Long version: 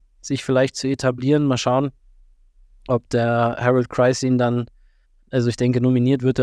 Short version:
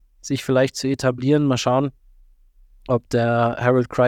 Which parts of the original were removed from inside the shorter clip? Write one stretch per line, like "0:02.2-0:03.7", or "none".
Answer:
none